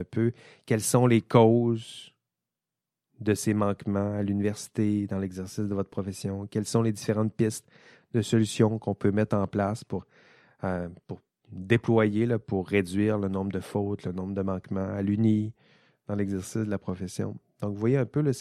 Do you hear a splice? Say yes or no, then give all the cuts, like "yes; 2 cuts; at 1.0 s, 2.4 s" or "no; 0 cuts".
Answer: no; 0 cuts